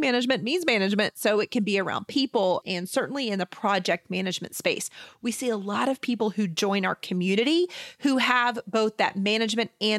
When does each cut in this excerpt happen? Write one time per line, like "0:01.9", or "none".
0:02.6

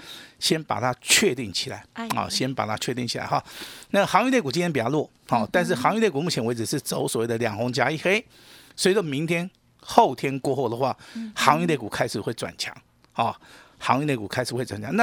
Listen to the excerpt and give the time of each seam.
none

